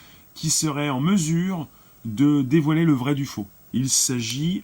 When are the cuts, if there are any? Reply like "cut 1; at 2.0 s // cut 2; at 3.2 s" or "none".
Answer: cut 1; at 3.7 s